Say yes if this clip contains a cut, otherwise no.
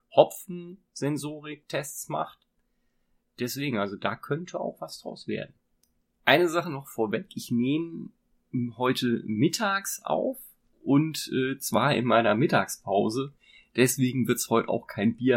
no